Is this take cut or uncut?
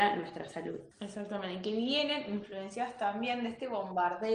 cut